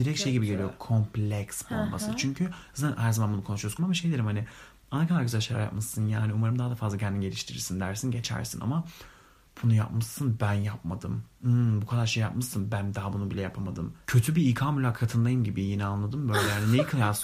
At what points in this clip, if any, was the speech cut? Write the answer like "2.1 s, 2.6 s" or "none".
3.8 s, 14.0 s